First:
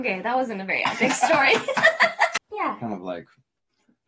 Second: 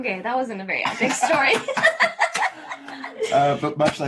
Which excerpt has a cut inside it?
first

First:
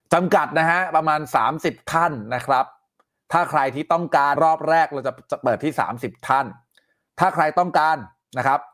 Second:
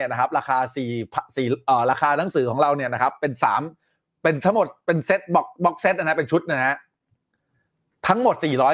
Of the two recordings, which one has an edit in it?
first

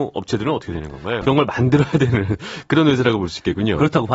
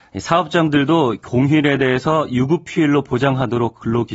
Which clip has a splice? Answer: first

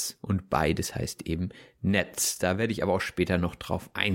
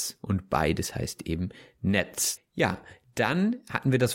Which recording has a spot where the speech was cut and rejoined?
second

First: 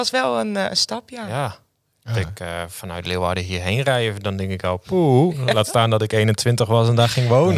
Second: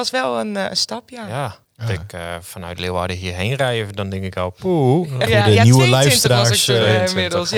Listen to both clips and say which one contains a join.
second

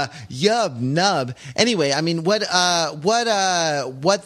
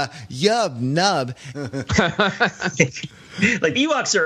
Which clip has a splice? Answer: second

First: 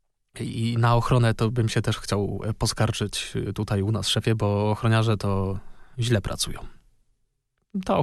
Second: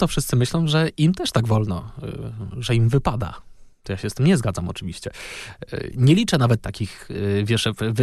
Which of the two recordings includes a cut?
second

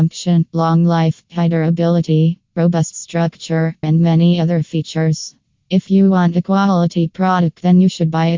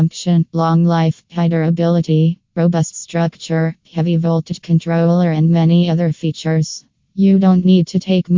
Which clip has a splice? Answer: first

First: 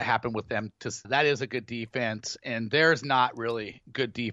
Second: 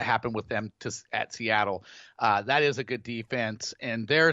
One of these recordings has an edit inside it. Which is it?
first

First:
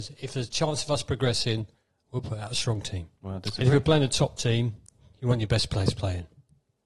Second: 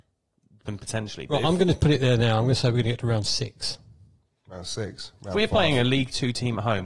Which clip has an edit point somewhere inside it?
first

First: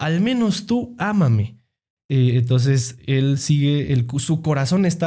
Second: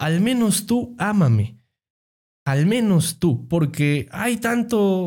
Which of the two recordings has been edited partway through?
first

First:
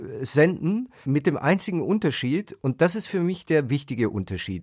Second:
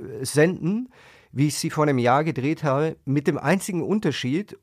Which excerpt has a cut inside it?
first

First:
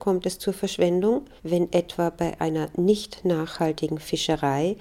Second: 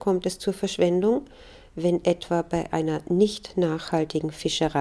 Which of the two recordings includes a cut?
first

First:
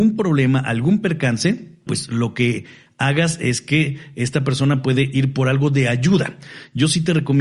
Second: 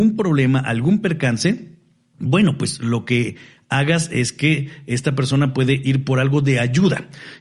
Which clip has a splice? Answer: first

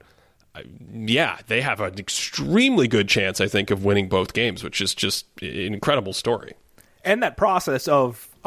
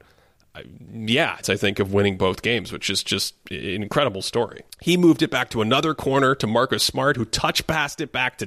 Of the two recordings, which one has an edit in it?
second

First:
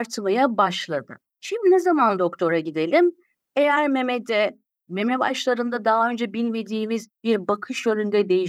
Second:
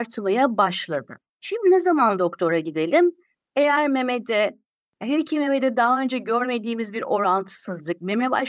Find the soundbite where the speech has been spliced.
first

